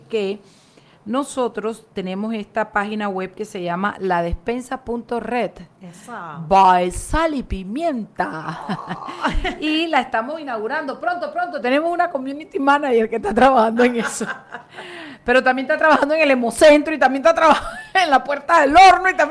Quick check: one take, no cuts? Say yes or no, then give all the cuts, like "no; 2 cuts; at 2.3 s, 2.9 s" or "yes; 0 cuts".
yes; 0 cuts